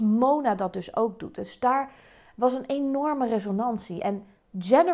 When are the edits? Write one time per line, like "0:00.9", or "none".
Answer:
none